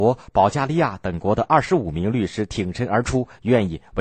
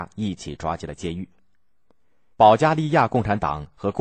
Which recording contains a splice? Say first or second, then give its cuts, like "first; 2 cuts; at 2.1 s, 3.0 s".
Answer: second; 1 cut; at 2.3 s